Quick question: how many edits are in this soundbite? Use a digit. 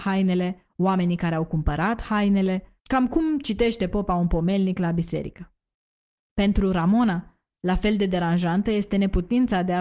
1